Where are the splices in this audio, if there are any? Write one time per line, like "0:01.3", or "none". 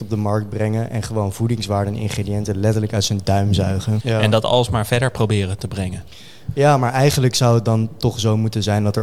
0:04.0